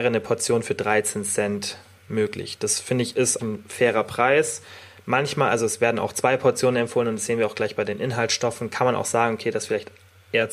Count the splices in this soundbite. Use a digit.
1